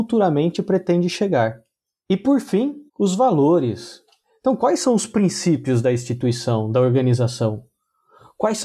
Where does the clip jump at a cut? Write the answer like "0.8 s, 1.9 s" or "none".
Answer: 2.9 s